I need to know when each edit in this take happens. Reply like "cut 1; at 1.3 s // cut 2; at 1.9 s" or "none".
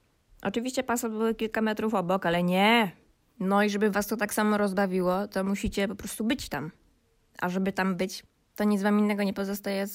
cut 1; at 3.2 s